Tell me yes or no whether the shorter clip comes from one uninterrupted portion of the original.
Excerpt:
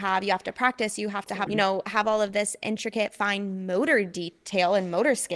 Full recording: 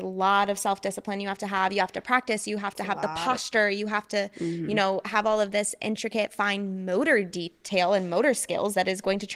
no